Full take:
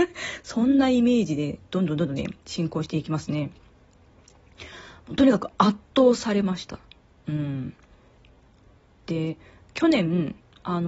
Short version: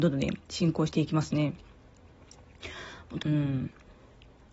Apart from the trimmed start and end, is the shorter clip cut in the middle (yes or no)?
yes